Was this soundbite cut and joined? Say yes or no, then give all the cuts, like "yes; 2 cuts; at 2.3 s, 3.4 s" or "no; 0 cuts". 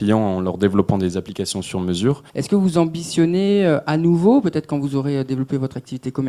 yes; 1 cut; at 2.3 s